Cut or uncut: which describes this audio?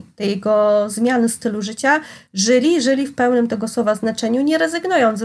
uncut